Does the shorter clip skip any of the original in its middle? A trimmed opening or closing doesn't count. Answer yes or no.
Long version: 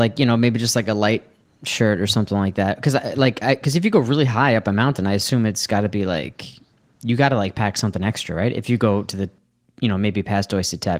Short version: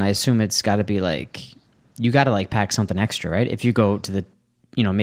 no